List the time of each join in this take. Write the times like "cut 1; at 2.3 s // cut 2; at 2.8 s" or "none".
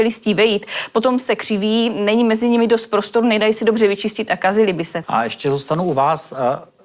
cut 1; at 5.0 s